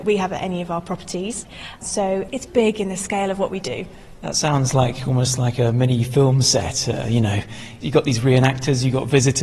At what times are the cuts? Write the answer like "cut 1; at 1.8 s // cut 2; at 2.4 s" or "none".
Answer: cut 1; at 2.5 s